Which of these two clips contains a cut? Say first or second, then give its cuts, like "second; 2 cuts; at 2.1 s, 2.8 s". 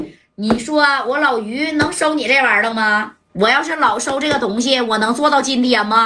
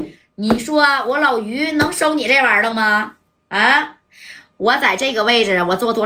first; 1 cut; at 3.3 s